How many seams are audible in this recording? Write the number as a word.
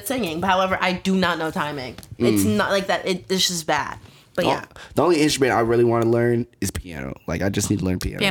zero